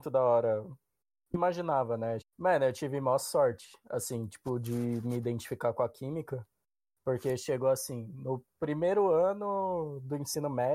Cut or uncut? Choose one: cut